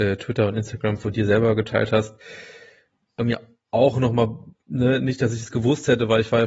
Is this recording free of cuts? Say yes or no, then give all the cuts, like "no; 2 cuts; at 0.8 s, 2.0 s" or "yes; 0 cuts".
yes; 0 cuts